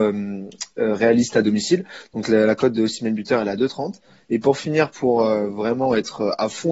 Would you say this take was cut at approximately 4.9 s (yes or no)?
no